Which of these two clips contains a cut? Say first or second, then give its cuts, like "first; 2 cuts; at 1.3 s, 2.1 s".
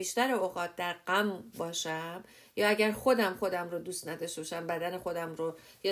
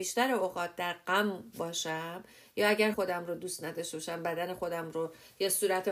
second; 1 cut; at 2.9 s